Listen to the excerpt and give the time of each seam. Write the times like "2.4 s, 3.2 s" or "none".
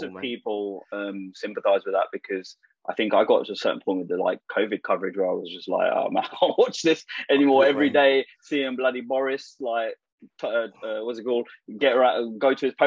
none